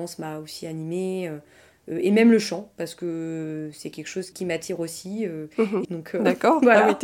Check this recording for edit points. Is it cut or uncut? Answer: cut